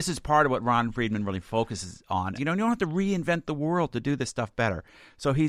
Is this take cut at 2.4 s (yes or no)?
yes